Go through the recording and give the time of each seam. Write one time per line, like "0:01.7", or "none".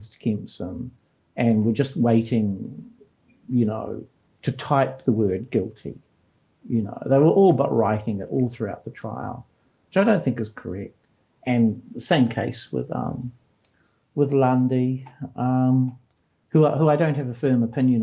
none